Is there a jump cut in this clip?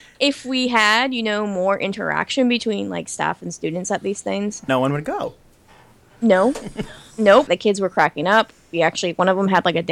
yes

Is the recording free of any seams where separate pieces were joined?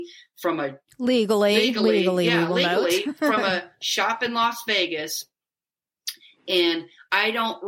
yes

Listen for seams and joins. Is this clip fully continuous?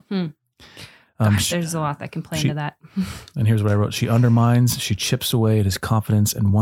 yes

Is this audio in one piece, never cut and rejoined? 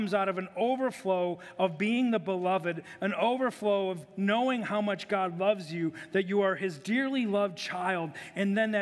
yes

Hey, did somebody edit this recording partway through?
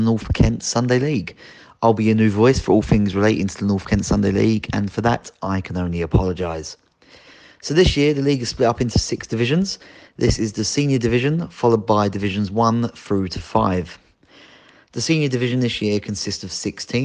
no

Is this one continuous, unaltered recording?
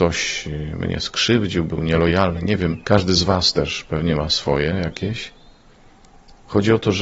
yes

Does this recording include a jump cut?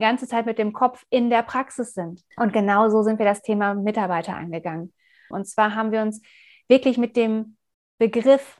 yes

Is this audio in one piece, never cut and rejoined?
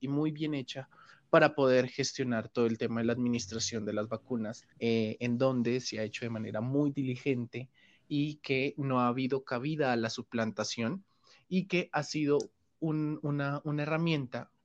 no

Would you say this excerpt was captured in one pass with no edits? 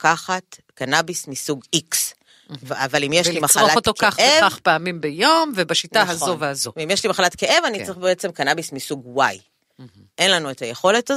yes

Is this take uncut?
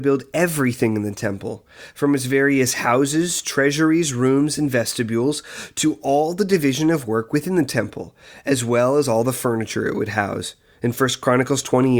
yes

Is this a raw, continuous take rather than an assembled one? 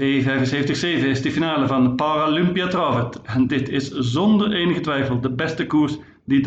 yes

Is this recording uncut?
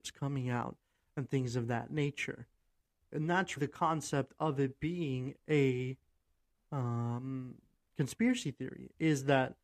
no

